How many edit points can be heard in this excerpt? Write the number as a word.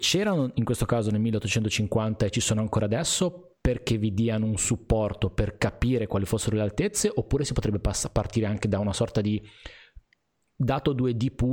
zero